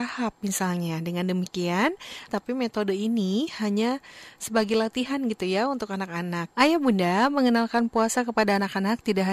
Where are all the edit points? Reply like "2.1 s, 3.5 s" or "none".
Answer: 2.3 s, 6.5 s